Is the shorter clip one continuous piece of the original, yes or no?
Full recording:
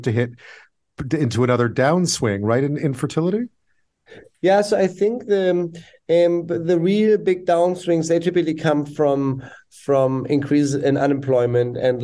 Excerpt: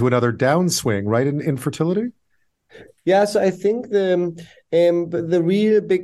yes